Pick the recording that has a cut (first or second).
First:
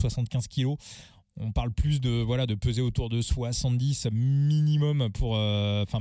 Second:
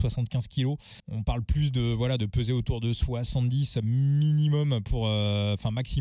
second